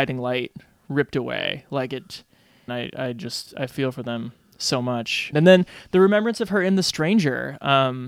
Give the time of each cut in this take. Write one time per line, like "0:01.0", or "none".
0:02.7
0:05.3